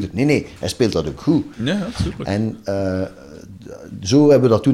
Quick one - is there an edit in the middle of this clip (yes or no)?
no